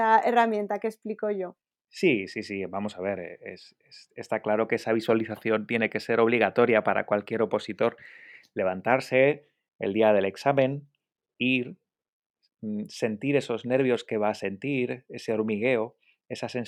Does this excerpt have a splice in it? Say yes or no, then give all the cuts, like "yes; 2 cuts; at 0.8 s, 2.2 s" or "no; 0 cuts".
no; 0 cuts